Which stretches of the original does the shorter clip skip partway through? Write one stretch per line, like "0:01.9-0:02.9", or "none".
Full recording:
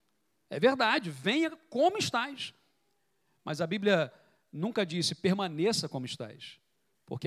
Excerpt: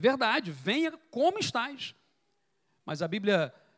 none